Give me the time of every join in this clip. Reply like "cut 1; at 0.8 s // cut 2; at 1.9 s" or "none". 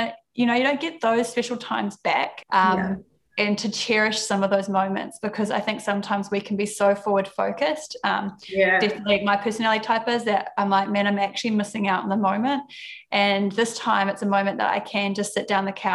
cut 1; at 2.4 s